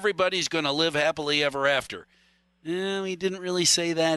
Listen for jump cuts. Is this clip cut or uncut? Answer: uncut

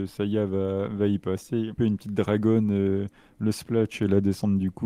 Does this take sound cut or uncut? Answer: cut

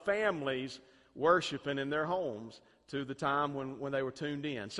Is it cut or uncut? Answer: uncut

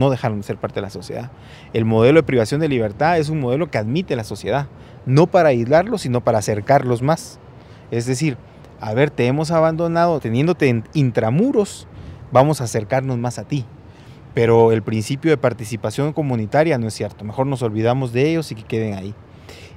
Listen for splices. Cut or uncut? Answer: cut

